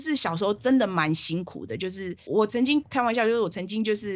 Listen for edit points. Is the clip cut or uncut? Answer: cut